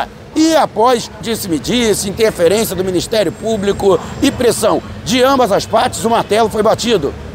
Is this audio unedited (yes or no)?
no